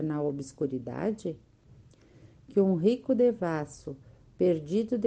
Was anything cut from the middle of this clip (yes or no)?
no